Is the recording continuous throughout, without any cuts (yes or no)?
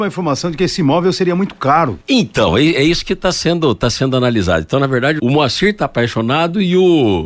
no